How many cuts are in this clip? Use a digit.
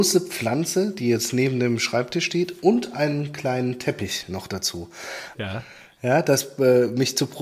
1